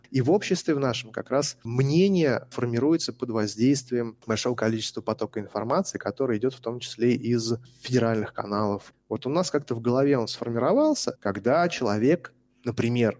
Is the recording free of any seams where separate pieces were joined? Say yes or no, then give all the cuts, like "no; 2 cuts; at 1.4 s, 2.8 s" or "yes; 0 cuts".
no; 2 cuts; at 8.9 s, 11.2 s